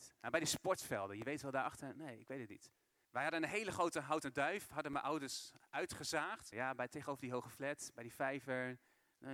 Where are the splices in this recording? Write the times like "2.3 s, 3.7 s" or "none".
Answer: 3.0 s, 6.5 s

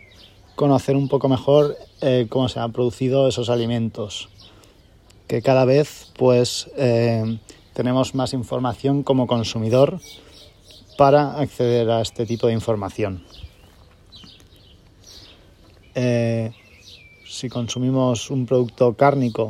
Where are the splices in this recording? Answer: 2.3 s, 15.8 s

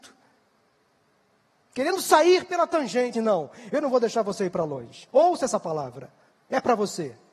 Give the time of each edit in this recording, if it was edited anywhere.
3.1 s

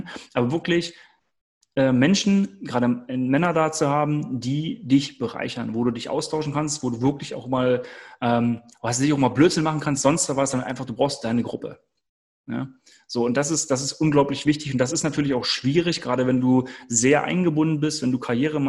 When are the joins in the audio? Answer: none

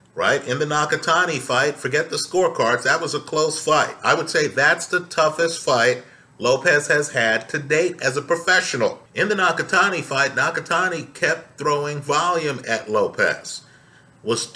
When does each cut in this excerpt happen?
9.1 s

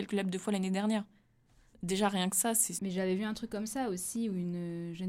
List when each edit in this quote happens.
2.7 s

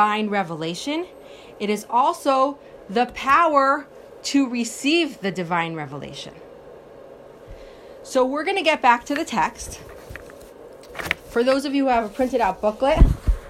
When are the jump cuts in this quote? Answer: none

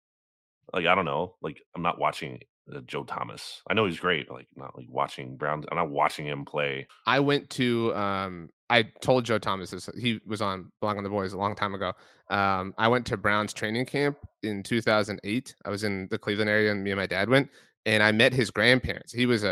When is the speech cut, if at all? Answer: 6.9 s

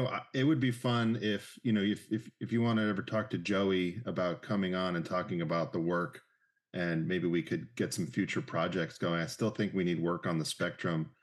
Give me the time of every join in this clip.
none

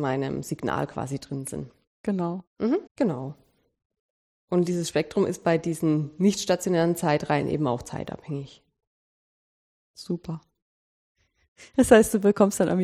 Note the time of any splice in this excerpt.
2.9 s

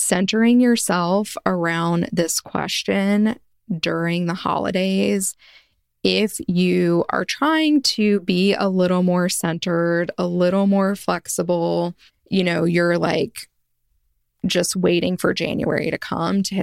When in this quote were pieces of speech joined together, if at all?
12.1 s

